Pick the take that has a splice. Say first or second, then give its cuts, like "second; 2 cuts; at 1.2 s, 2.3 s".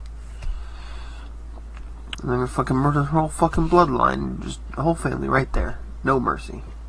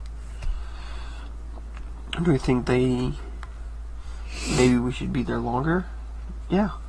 first; 1 cut; at 2.1 s